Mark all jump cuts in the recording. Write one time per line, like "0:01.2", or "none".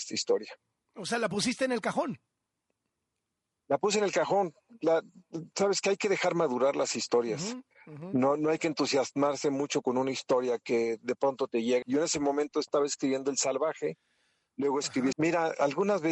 0:11.8
0:15.1